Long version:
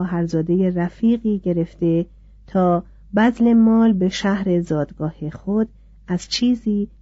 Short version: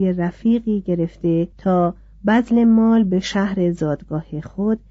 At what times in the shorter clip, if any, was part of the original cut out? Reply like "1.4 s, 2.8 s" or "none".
1.5 s